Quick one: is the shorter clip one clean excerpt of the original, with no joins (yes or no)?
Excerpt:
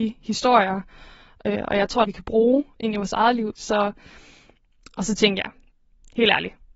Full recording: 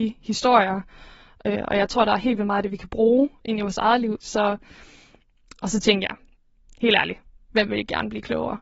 no